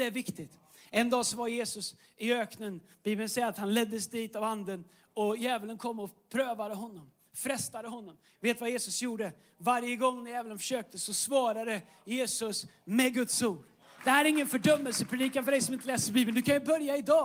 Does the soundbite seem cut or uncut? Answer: cut